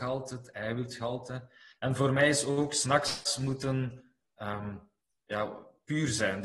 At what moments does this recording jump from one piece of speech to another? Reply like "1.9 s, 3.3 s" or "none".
1.7 s